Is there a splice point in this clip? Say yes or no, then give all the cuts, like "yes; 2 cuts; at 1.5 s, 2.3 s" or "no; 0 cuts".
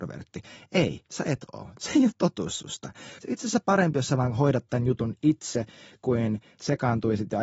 yes; 1 cut; at 3.2 s